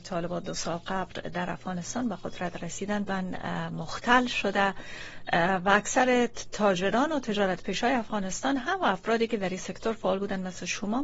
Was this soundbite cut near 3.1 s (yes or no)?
yes